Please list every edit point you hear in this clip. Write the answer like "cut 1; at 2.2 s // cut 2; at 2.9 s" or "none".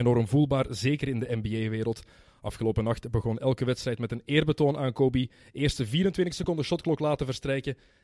none